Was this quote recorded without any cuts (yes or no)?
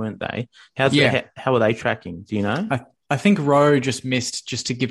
yes